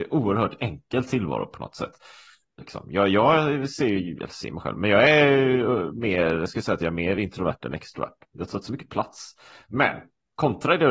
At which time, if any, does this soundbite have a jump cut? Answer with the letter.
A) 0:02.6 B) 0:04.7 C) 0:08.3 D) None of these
A